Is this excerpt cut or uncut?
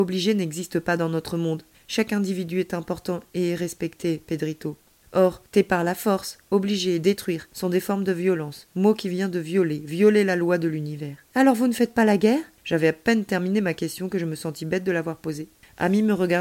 uncut